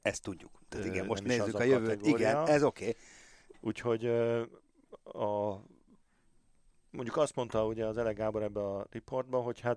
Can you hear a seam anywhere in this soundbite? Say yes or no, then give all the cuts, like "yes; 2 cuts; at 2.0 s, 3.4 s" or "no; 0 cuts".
no; 0 cuts